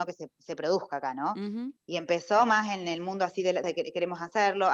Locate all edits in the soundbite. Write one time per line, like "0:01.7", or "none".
0:01.8
0:03.6